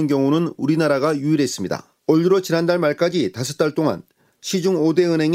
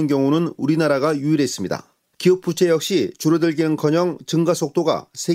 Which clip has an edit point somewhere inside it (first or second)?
first